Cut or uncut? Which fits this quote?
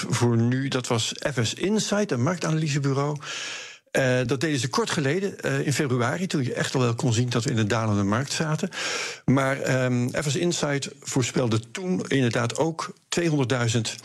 uncut